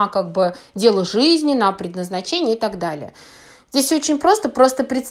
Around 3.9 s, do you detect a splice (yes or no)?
no